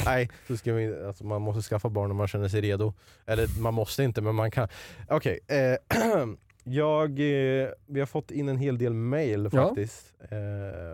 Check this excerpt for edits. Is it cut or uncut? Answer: uncut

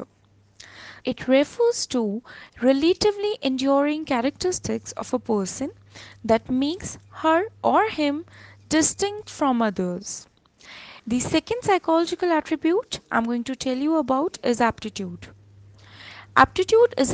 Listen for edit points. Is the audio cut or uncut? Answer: cut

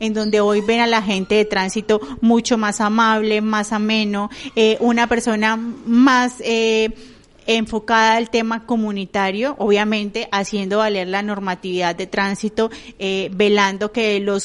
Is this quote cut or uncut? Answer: uncut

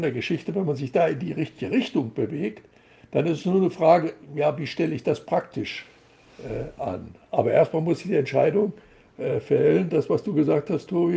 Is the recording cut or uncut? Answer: uncut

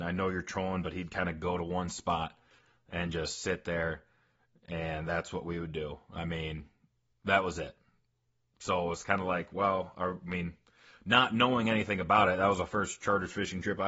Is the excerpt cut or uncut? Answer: uncut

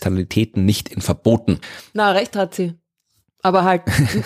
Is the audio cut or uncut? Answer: cut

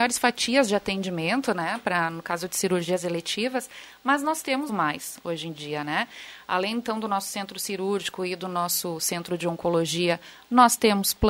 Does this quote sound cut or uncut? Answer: cut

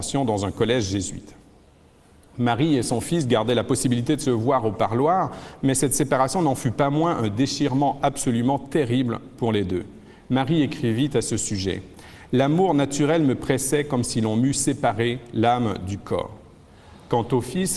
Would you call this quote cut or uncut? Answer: uncut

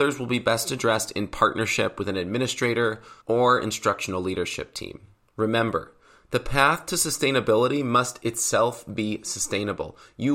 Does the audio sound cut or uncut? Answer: cut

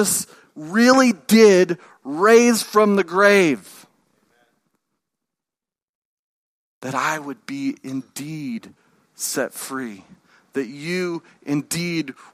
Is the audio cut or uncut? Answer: uncut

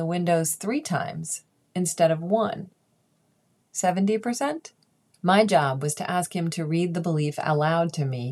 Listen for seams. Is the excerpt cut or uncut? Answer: cut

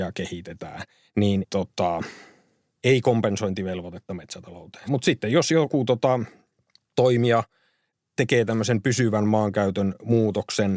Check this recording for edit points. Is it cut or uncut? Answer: cut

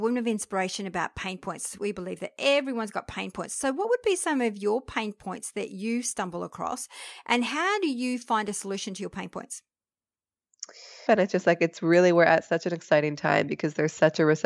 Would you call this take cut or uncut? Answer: cut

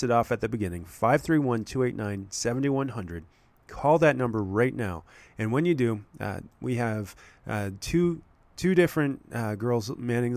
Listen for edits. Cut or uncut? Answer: uncut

